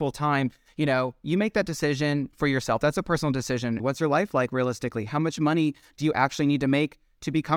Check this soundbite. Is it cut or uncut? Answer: cut